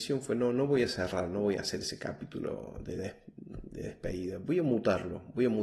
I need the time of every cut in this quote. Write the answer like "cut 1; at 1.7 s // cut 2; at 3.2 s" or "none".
none